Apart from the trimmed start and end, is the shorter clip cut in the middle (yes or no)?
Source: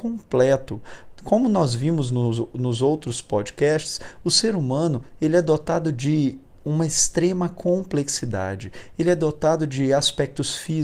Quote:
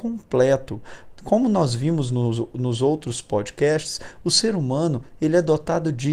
no